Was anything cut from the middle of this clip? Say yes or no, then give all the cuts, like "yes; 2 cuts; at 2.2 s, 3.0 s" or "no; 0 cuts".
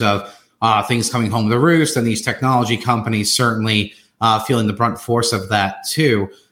no; 0 cuts